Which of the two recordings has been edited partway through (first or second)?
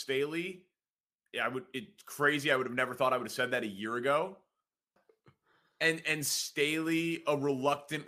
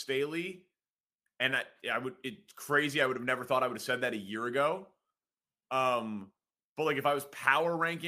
first